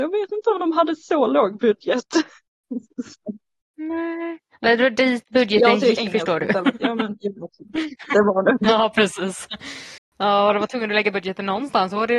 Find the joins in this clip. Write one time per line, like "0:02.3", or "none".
none